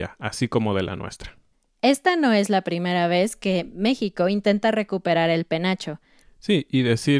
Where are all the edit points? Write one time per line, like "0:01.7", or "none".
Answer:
0:06.2